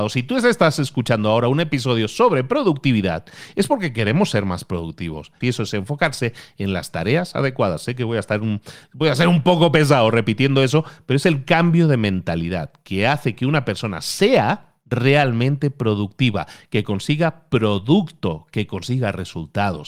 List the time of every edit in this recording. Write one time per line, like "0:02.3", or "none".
0:05.4